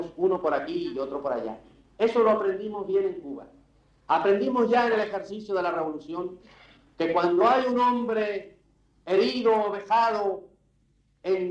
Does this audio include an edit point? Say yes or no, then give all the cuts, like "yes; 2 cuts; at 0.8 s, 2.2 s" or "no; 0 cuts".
no; 0 cuts